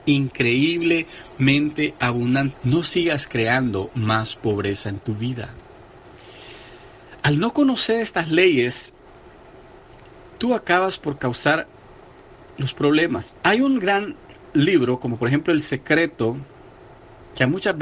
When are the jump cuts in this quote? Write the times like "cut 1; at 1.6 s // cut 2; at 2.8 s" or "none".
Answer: cut 1; at 2.5 s // cut 2; at 13.4 s